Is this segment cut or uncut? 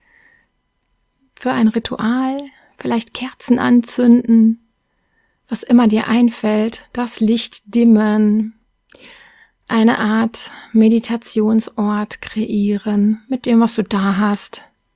uncut